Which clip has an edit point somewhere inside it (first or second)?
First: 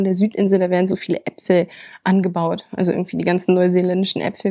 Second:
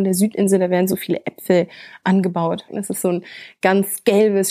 second